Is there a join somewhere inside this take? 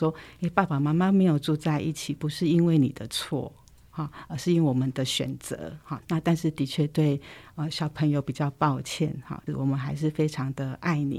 yes; 2 cuts; at 6.0 s, 9.5 s

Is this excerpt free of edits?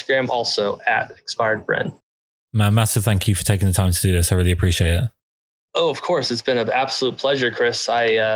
yes; 0 cuts

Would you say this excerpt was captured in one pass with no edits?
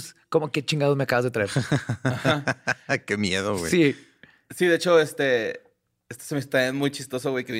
yes; 0 cuts

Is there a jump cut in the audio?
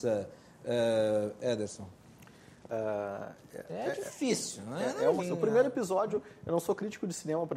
yes; 1 cut; at 5.2 s

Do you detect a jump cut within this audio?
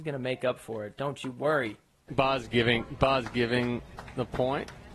yes; 1 cut; at 2.1 s

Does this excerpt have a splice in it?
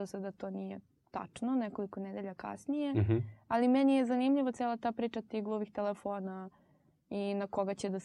yes; 1 cut; at 4.5 s

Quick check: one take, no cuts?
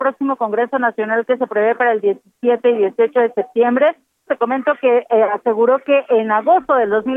no; 1 cut; at 4.3 s

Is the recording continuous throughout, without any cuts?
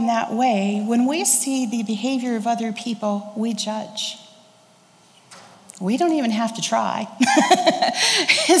yes; 0 cuts

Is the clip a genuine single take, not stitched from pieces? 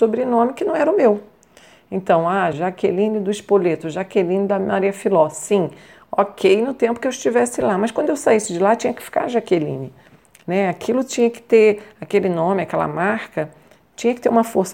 no; 1 cut; at 2.5 s

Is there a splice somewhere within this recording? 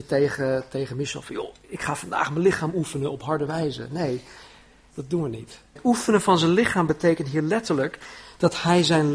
yes; 1 cut; at 5.8 s

